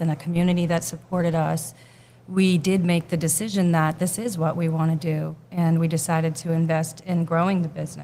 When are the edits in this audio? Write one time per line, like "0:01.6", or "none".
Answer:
none